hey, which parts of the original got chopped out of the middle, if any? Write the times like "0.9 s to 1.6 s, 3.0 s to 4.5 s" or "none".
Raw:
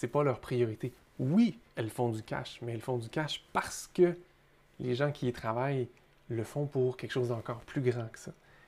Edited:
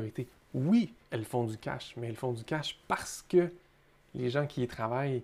none